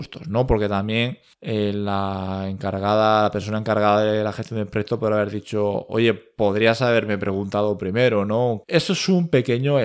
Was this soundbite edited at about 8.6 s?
yes; 1 cut; at 8.6 s

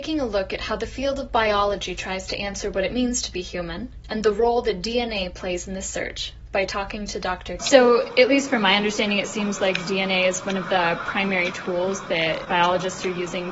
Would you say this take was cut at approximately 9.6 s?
no; 1 cut; at 7.6 s

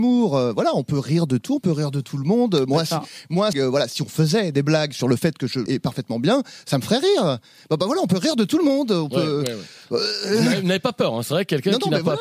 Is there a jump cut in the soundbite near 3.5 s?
yes; 2 cuts; at 3.5 s, 5.7 s

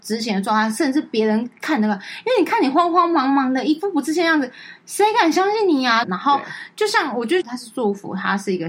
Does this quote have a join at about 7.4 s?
yes; 2 cuts; at 6.0 s, 7.4 s

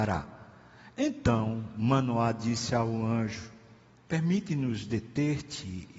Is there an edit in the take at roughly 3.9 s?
yes; 1 cut; at 3.9 s

